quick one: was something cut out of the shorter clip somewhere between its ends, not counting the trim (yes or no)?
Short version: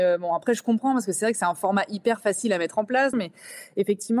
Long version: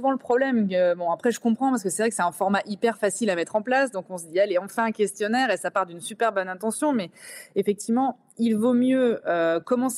yes